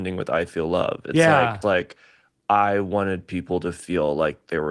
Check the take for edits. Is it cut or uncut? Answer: cut